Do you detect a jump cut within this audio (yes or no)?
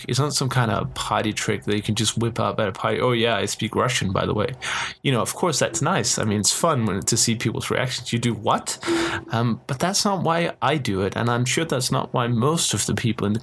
no